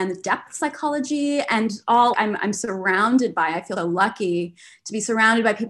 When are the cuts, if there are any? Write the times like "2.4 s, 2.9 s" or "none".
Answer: 2.1 s, 3.8 s